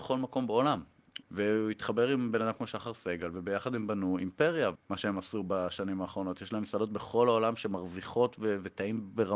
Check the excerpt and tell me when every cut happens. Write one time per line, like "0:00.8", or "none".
0:01.2
0:04.8